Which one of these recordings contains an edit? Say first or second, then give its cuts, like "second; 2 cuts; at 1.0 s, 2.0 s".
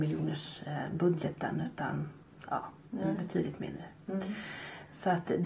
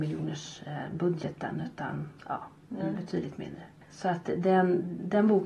second; 2 cuts; at 2.2 s, 3.8 s